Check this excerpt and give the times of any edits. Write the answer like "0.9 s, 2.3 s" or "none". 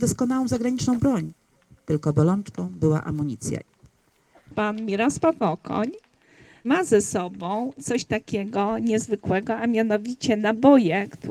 none